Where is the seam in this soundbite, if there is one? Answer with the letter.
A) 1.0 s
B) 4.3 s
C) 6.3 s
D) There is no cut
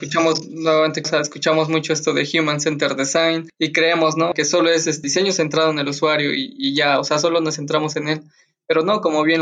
A